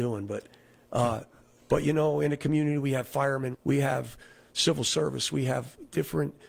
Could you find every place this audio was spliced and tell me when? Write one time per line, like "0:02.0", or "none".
0:01.6
0:03.5

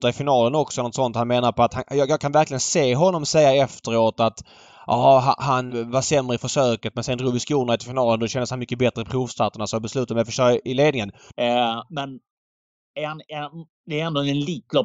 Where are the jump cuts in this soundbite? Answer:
0:05.7
0:11.3

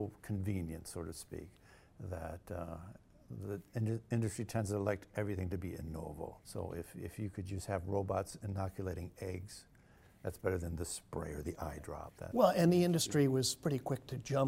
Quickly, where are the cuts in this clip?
0:06.4

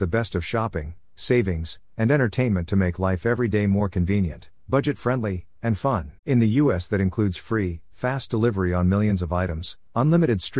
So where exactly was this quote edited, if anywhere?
0:06.2

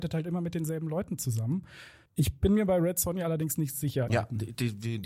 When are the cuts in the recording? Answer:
0:02.1
0:04.1

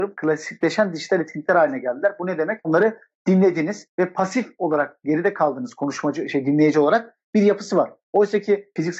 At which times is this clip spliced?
0:02.6

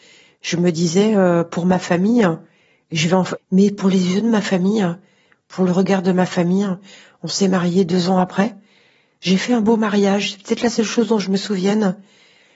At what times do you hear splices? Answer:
0:03.4

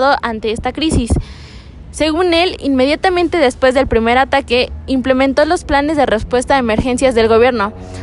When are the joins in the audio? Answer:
none

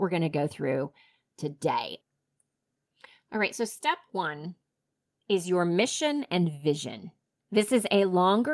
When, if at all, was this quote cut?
none

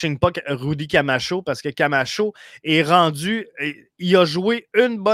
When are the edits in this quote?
none

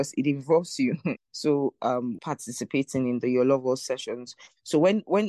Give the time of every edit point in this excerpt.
0:01.2
0:02.2

